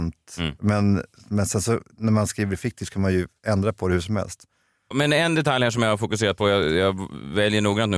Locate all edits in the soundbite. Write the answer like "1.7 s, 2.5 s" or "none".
none